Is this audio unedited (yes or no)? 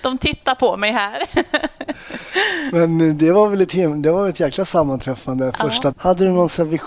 no